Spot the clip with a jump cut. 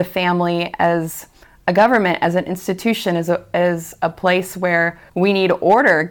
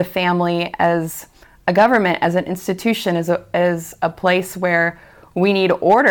first; 1 cut; at 5.1 s

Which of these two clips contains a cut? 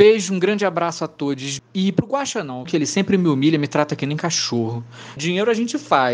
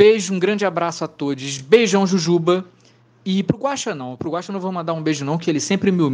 first; 3 cuts; at 1.6 s, 2.7 s, 5.2 s

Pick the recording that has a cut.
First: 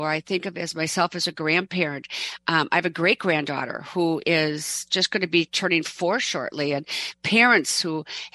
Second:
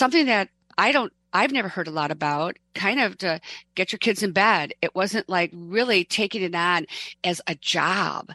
second; 2 cuts; at 2.6 s, 3.7 s

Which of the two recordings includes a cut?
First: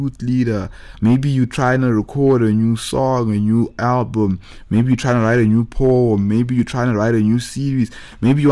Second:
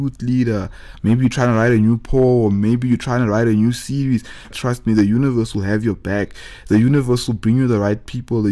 second; 2 cuts; at 1.0 s, 4.5 s

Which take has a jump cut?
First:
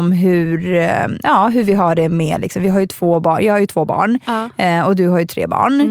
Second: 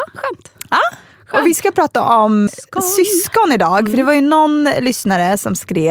second; 1 cut; at 2.5 s

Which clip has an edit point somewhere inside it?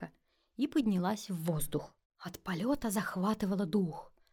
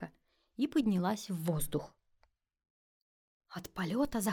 first; 1 cut; at 2.0 s

